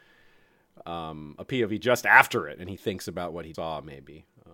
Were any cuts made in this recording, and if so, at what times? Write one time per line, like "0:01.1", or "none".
0:03.5